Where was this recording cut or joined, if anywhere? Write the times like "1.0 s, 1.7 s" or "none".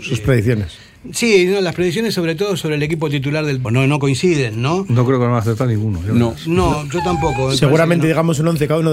3.6 s